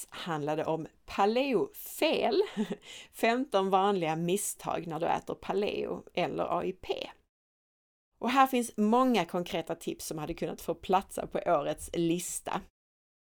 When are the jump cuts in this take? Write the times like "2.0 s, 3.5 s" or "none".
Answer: none